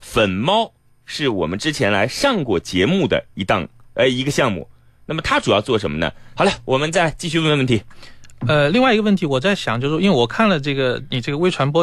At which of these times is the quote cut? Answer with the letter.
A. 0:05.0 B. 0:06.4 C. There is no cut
B